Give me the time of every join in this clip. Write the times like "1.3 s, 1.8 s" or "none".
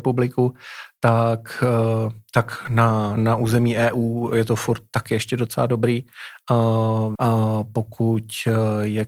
3.2 s, 7.1 s